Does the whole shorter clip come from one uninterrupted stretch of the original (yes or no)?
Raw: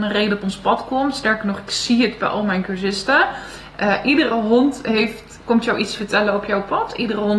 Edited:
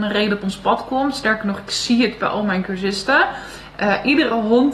yes